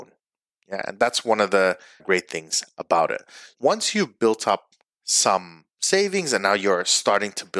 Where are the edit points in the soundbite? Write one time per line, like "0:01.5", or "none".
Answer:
0:02.0
0:03.5
0:05.7